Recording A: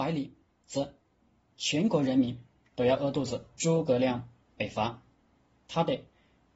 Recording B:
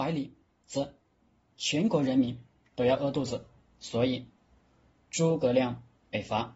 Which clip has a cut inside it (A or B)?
A